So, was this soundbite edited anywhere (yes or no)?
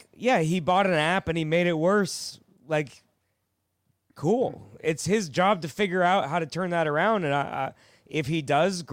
no